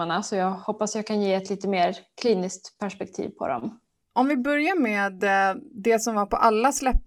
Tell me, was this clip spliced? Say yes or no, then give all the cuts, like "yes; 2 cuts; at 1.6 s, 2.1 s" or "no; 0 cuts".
yes; 1 cut; at 4.0 s